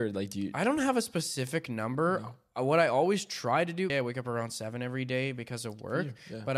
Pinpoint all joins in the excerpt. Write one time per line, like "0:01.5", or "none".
0:03.9